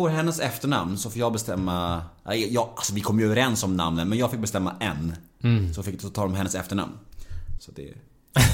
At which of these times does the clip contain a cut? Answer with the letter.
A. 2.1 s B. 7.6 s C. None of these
B